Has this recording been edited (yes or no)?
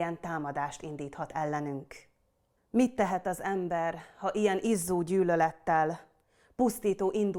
yes